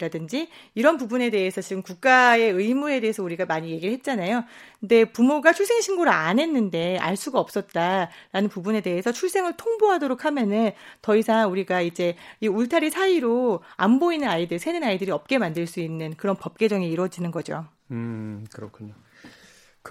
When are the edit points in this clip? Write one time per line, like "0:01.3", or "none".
none